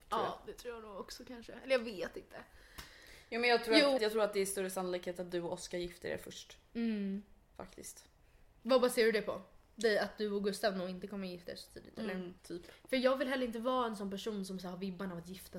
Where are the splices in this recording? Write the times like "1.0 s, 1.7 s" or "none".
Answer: 4.0 s, 12.4 s